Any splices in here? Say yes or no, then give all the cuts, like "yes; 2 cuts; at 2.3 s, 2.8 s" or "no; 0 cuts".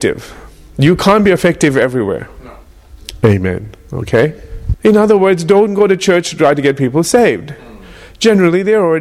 yes; 1 cut; at 4.7 s